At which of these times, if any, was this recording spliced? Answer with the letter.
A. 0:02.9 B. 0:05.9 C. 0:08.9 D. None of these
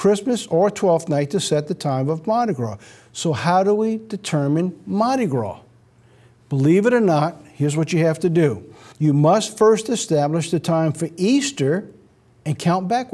C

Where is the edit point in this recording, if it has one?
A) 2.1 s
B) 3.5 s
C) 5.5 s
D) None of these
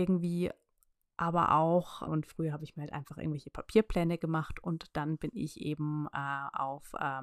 A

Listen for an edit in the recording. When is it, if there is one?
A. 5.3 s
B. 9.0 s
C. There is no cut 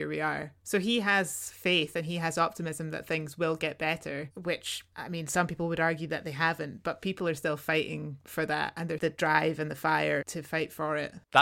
B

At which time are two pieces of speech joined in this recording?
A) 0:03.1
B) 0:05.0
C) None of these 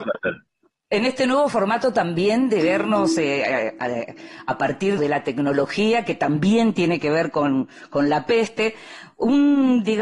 B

